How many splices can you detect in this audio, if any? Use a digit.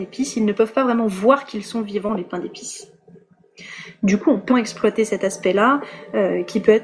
1